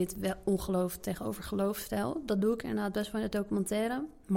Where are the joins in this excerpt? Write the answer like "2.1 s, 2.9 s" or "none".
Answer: none

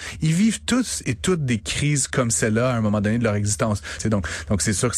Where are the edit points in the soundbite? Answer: 4.0 s

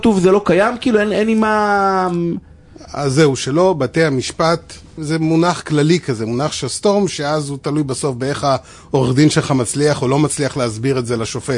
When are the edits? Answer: 5.0 s

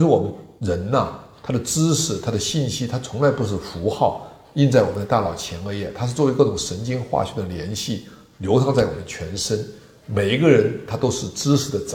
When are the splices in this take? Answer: none

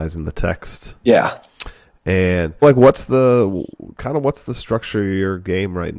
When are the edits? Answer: 1.0 s, 2.6 s

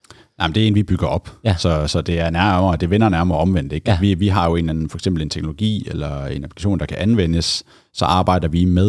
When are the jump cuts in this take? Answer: none

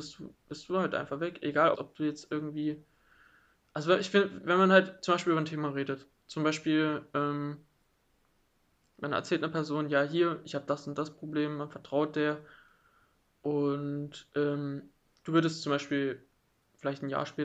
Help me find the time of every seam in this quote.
1.7 s

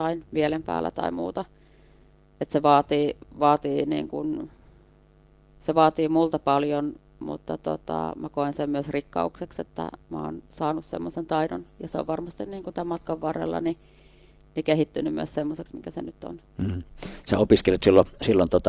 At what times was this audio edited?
none

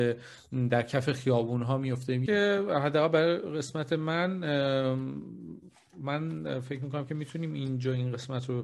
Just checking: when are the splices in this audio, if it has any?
2.3 s

